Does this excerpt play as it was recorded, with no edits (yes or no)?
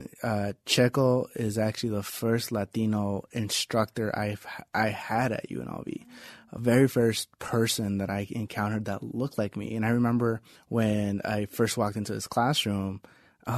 yes